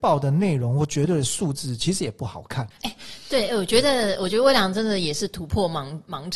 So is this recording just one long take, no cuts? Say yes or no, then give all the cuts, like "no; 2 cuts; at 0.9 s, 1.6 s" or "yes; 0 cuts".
no; 1 cut; at 2.7 s